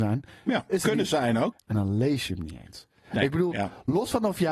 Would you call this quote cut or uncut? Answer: cut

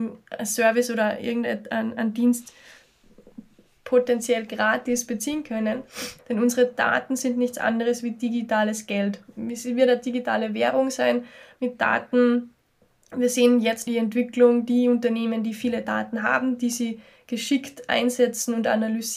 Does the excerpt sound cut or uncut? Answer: cut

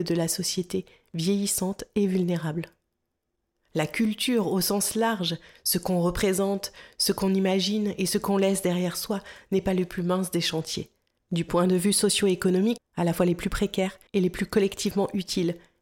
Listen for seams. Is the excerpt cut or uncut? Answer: cut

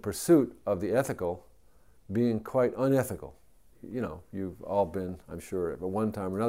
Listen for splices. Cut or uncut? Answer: cut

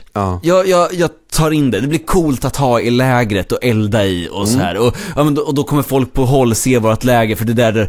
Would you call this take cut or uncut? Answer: uncut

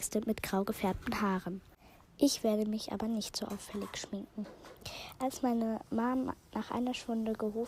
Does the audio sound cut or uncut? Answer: uncut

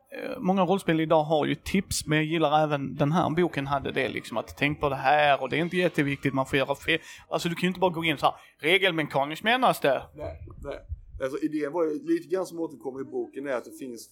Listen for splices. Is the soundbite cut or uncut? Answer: cut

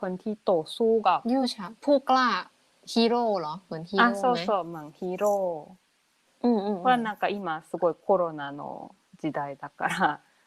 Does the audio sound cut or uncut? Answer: uncut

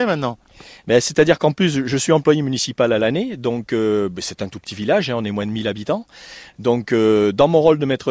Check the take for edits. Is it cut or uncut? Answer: uncut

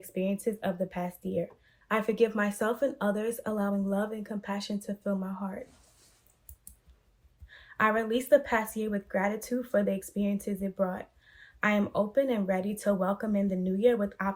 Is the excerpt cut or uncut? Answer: cut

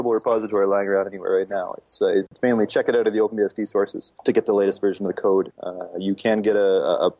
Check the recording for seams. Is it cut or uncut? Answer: cut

